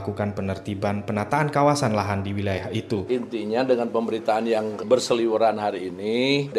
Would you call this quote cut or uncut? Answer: cut